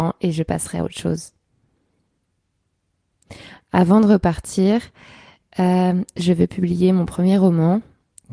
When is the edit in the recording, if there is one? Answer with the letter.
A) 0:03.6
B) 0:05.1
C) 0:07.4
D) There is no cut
D